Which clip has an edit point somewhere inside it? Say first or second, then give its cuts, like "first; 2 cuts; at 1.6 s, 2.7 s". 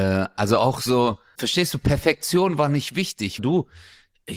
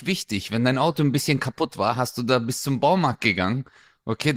first; 2 cuts; at 1.3 s, 3.4 s